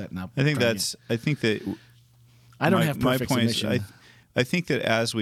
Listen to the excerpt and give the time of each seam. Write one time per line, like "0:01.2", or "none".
none